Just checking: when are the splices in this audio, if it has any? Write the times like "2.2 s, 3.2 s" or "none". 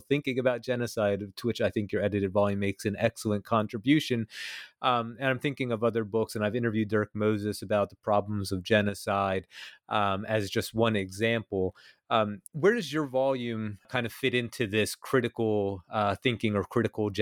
12.5 s, 13.8 s